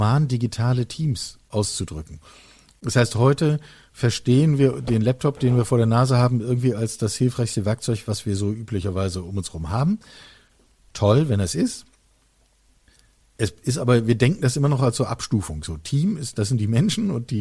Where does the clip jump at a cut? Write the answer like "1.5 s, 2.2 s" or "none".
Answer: none